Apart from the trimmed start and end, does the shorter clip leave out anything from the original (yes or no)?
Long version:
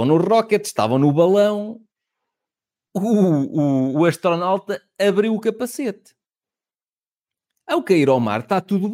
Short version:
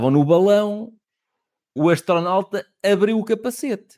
yes